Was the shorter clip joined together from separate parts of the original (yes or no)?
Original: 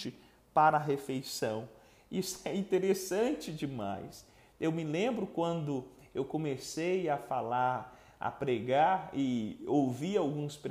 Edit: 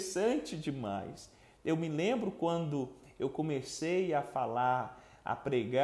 no